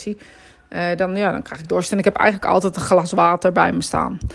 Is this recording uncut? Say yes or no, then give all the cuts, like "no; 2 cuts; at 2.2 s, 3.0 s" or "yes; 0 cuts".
yes; 0 cuts